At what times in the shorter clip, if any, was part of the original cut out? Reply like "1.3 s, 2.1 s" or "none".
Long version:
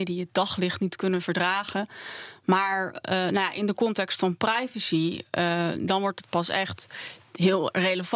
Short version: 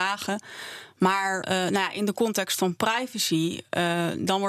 1.4 s